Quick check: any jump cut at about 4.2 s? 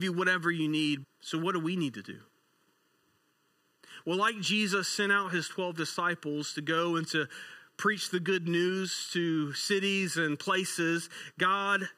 no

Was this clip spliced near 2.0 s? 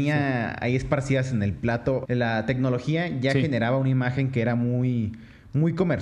yes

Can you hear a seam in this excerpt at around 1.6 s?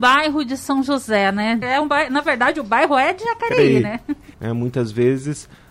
yes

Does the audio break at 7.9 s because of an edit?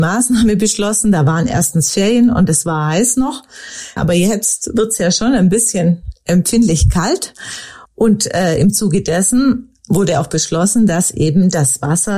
yes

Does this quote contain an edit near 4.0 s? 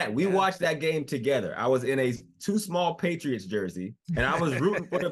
yes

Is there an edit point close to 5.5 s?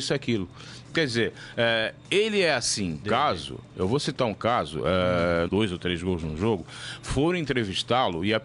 yes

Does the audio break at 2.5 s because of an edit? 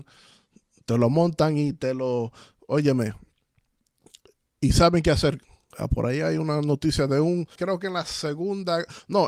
no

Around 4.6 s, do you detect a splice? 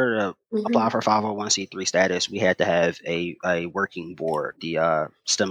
yes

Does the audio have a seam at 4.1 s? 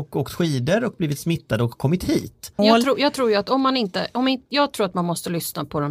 no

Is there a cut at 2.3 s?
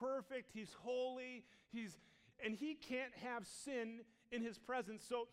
yes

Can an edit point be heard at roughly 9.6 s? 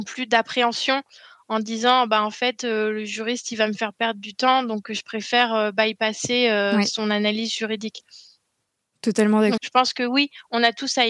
yes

